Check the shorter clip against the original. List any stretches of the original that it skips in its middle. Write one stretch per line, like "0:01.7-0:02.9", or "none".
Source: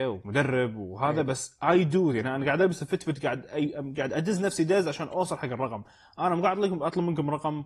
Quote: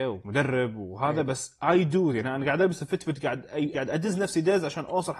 0:03.7-0:04.0

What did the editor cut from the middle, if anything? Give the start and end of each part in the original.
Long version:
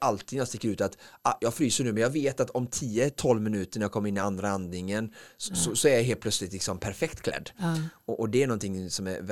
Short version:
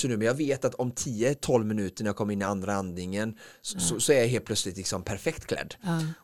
none

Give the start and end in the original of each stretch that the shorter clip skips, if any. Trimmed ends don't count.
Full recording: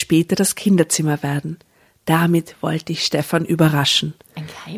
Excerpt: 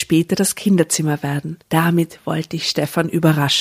0:01.6-0:02.0

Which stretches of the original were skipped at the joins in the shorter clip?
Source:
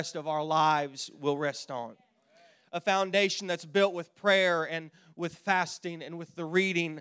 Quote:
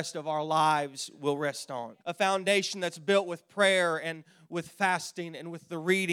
0:02.0-0:02.7

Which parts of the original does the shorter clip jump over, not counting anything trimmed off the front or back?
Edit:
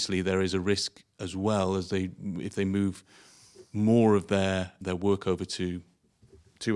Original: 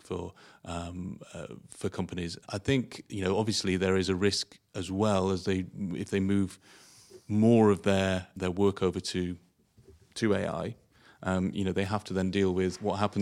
none

